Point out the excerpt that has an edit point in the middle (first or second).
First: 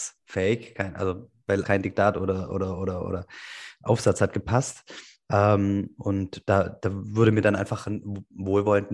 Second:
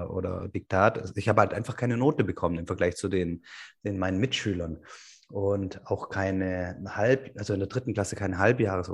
first